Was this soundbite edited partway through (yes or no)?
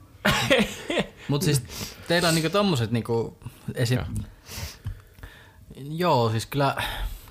yes